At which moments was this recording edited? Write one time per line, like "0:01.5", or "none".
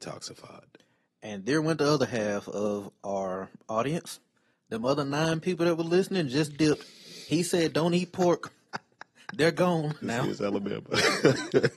0:10.0